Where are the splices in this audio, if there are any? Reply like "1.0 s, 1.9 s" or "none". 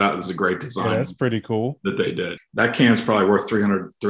2.4 s